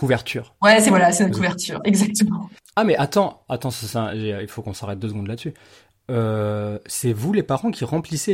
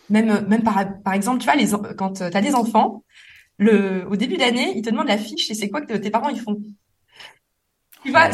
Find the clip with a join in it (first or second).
first